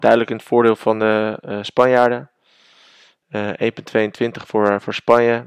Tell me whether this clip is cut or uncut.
uncut